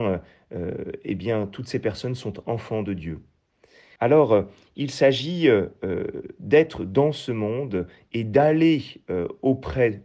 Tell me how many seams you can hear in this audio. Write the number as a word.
one